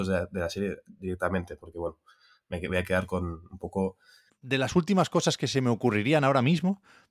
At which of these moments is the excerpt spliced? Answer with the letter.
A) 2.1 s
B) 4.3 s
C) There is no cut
B